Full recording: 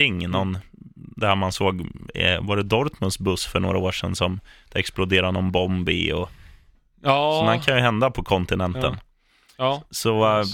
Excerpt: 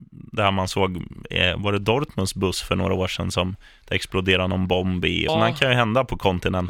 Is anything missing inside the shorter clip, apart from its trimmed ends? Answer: yes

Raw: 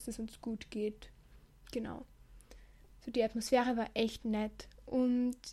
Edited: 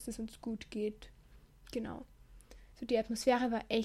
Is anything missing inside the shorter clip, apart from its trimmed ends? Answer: yes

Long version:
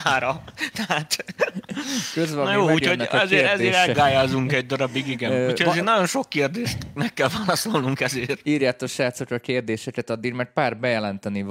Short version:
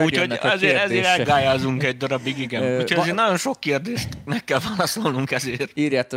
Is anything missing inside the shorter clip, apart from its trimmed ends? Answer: no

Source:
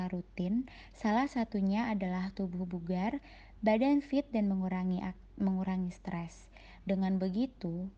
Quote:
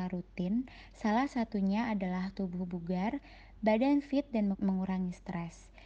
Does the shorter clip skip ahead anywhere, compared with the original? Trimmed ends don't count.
yes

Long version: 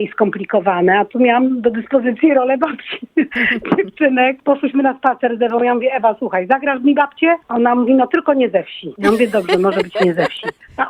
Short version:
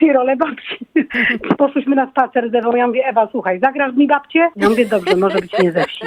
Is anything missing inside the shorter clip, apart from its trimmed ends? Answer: yes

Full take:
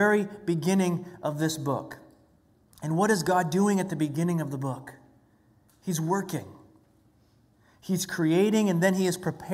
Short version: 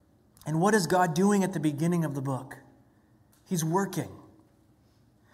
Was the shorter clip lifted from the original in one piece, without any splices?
yes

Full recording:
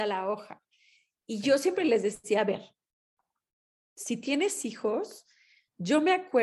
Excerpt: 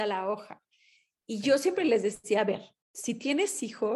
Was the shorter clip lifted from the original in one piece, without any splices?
no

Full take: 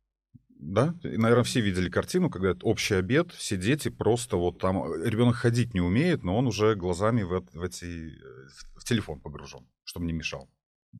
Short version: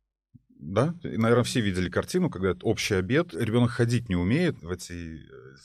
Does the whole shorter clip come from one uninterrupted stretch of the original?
no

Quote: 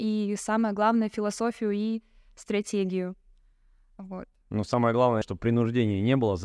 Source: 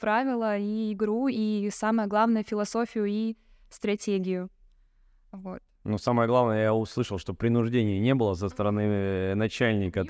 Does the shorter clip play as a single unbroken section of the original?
no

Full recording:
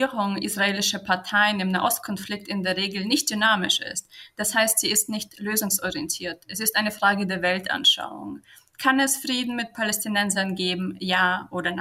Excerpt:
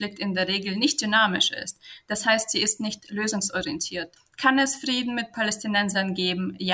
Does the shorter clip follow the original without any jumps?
no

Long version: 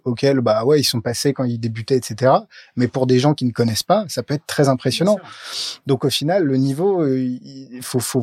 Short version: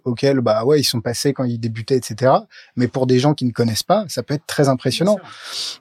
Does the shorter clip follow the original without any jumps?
yes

